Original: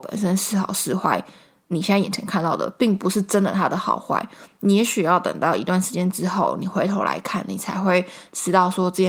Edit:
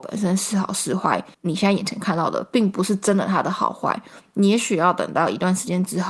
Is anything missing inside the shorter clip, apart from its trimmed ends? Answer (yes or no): yes